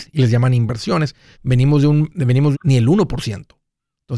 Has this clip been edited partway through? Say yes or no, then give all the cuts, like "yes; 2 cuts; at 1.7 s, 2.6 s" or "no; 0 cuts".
yes; 2 cuts; at 1.3 s, 2.5 s